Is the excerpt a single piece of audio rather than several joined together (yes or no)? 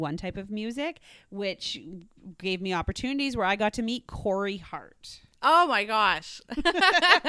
yes